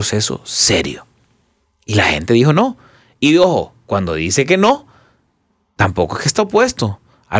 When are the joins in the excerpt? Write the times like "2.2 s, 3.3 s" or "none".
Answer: none